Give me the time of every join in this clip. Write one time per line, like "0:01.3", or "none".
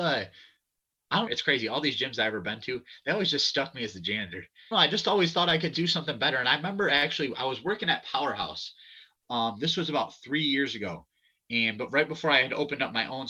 0:01.3
0:04.7